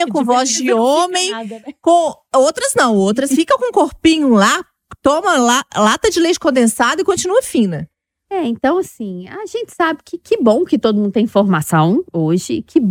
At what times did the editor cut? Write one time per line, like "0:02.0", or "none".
none